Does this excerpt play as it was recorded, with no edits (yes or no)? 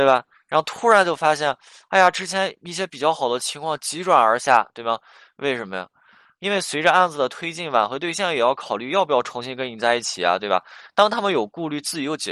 yes